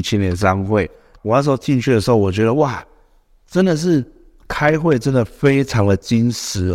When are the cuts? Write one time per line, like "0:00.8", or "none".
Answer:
0:01.2